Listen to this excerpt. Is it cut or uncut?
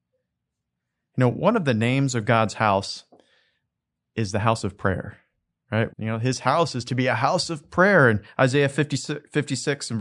cut